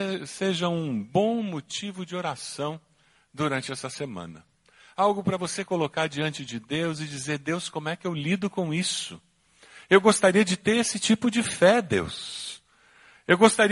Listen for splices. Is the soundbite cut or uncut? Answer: uncut